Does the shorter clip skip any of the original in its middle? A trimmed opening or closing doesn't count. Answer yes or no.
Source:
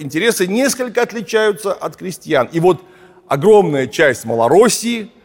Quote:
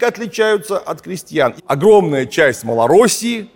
yes